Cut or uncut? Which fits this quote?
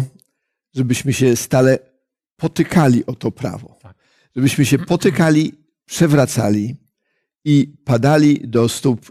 uncut